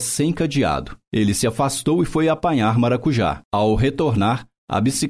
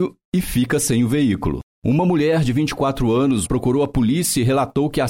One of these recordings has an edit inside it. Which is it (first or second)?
second